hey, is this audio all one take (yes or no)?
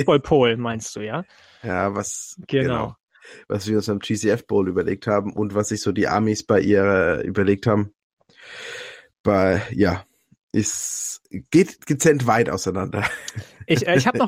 yes